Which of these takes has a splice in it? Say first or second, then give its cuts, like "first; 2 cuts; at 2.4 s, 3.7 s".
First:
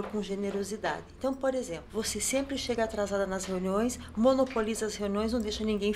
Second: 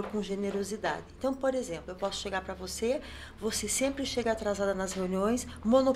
first; 1 cut; at 1.9 s